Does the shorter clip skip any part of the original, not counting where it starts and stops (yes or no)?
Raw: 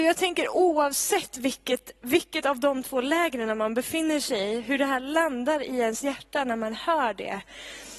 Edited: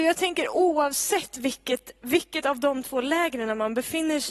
no